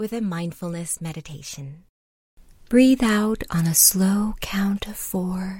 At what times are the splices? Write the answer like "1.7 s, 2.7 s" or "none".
2.6 s